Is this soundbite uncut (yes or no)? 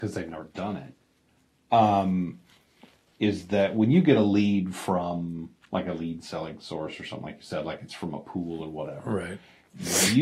yes